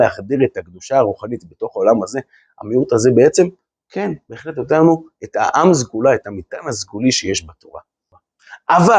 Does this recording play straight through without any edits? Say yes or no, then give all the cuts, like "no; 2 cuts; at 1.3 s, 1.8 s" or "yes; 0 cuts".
yes; 0 cuts